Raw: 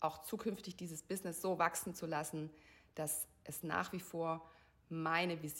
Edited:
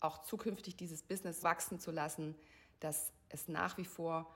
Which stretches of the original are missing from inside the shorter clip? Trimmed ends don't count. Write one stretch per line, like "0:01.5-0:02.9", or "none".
0:01.4-0:01.6